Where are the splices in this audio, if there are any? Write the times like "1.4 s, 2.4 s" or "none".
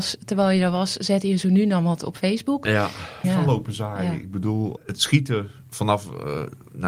3.2 s, 4.8 s